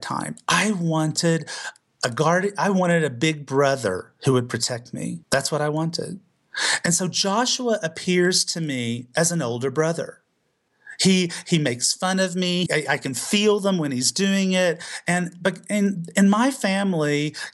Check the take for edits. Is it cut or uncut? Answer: cut